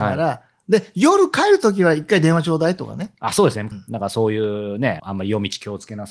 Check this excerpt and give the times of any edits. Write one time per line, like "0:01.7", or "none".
0:03.7
0:05.0

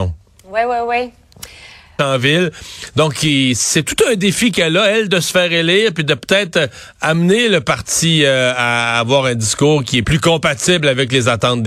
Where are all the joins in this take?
0:02.0
0:10.0

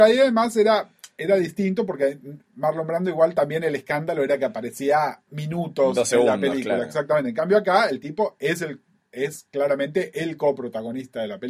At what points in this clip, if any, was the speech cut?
none

